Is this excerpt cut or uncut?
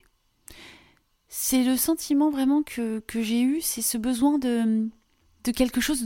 uncut